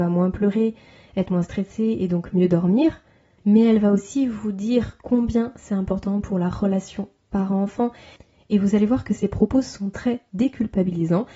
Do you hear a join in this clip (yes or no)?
no